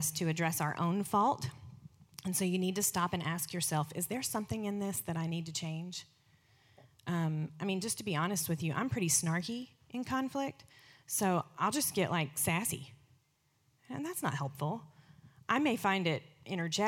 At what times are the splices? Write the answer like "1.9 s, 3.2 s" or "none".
none